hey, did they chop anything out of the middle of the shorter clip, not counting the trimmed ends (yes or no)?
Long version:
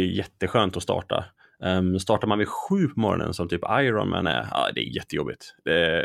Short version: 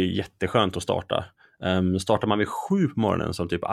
no